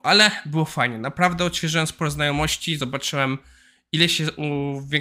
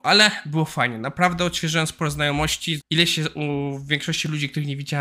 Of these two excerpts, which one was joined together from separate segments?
second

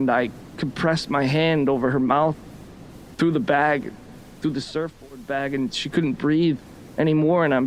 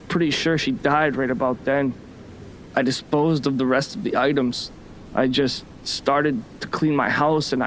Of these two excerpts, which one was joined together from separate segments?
second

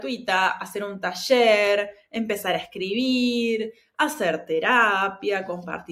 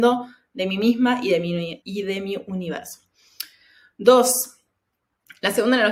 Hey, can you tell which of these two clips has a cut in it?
second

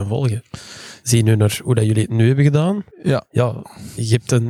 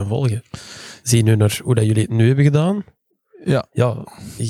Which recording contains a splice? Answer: first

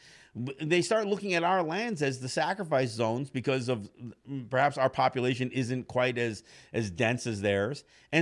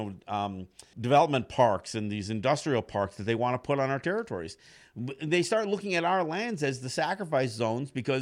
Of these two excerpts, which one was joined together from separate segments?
second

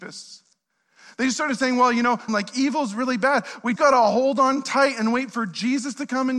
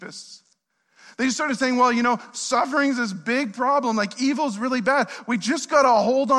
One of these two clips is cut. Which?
first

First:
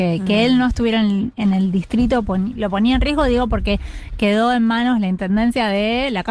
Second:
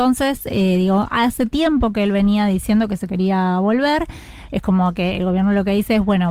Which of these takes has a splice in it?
second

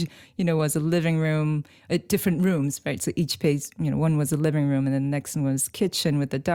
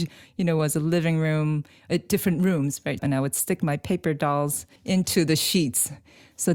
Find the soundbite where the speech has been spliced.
second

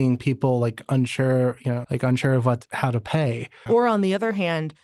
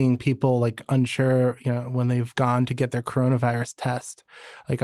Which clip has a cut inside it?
first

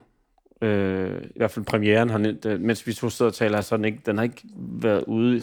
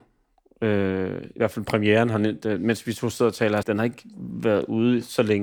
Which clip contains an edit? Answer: second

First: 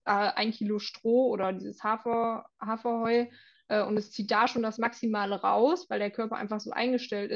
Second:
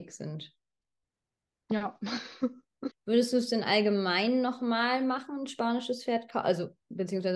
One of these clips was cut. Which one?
second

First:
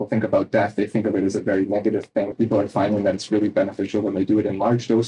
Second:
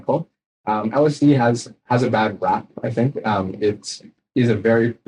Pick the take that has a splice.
first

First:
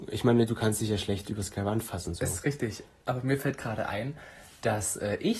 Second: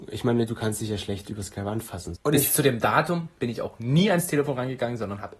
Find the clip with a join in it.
second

